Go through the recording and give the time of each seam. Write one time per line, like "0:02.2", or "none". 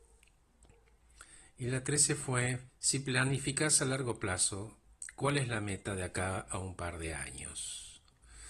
0:02.7